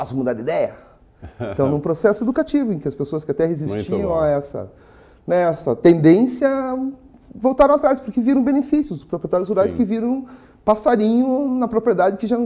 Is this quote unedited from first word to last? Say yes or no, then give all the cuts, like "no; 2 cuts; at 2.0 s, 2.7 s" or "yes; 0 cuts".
yes; 0 cuts